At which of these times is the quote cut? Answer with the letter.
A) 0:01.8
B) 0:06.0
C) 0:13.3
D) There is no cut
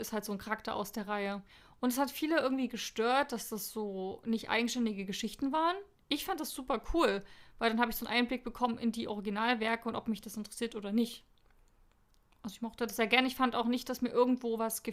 D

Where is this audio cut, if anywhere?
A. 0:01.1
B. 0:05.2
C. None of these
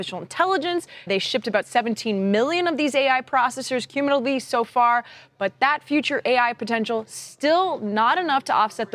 A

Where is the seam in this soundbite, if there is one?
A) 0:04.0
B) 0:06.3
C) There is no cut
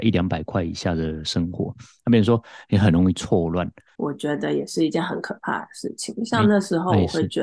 A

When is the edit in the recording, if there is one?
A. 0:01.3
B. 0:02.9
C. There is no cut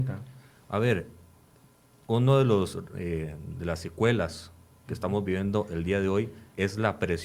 C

